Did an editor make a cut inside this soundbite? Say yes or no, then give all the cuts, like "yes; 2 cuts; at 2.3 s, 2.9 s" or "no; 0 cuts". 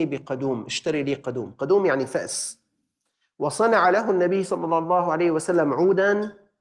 no; 0 cuts